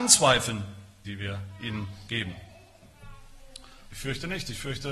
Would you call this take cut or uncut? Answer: cut